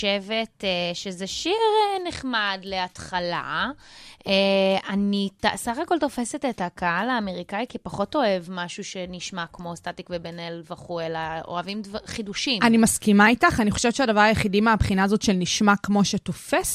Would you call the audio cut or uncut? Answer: cut